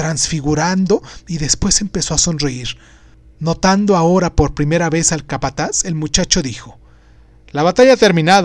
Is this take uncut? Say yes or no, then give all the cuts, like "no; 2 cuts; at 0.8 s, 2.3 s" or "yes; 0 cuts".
yes; 0 cuts